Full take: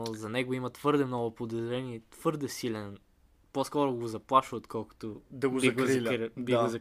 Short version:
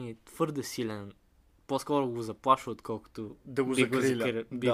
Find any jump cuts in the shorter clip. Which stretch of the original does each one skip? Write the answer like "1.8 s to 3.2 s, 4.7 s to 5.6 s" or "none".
none

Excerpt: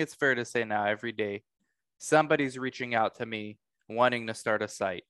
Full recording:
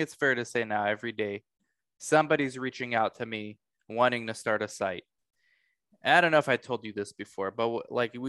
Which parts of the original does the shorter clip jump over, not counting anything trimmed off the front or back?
none

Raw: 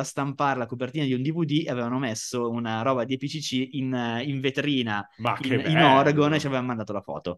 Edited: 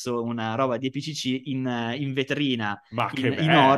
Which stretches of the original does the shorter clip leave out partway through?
none

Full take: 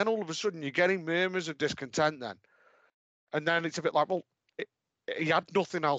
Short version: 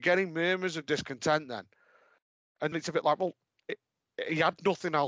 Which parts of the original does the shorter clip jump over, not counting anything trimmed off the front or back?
3.4 s to 3.6 s

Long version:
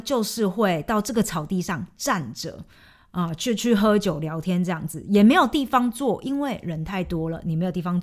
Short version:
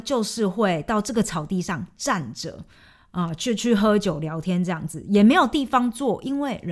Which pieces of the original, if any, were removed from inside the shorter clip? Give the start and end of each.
none

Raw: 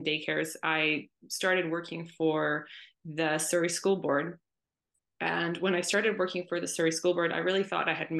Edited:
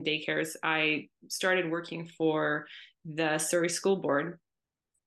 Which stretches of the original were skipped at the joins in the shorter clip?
none

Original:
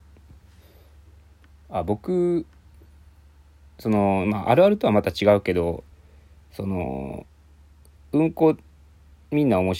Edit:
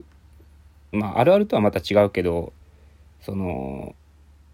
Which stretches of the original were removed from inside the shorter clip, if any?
3.3 s to 4.2 s

